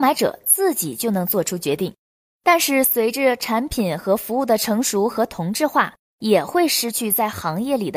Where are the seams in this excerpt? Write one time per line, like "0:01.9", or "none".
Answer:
0:06.1